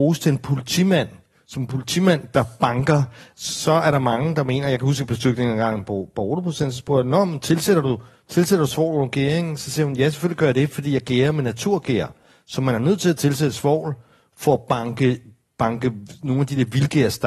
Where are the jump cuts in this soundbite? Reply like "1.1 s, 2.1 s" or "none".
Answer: 3.3 s